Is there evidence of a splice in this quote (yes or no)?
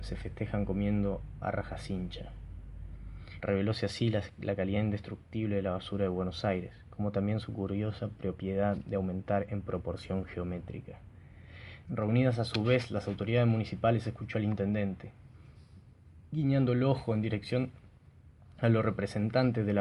yes